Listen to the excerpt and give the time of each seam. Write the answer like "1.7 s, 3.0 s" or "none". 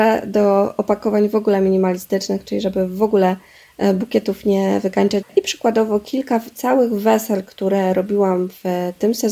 5.2 s